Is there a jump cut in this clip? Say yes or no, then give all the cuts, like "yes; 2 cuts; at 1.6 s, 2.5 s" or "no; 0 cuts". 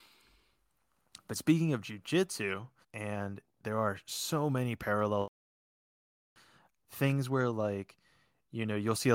yes; 1 cut; at 2.8 s